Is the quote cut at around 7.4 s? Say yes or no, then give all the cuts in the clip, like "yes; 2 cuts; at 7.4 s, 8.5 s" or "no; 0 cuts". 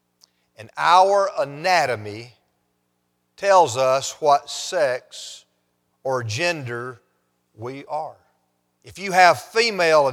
no; 1 cut; at 8.8 s